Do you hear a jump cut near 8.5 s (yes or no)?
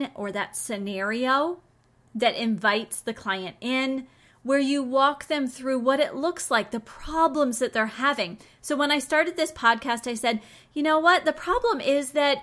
no